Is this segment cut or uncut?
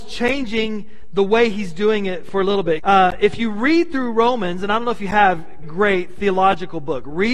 cut